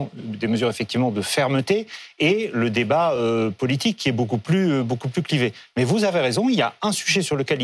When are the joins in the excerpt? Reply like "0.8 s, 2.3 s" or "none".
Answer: none